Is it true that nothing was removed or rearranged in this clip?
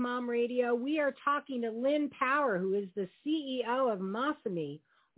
yes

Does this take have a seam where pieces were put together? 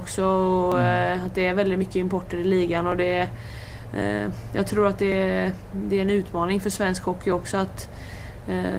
no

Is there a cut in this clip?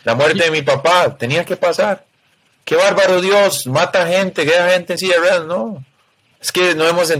no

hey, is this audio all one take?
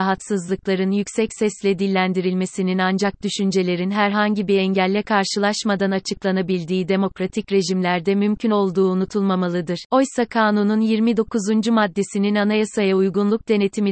no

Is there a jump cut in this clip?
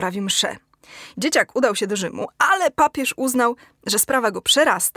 yes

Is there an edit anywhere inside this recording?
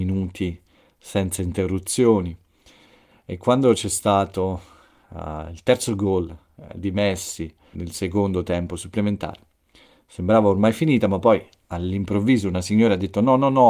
yes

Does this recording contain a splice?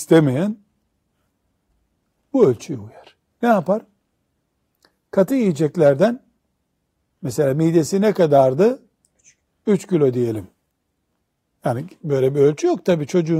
no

